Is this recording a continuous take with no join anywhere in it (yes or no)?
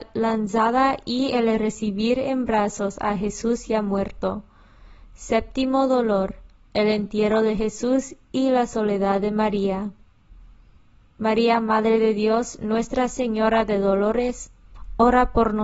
yes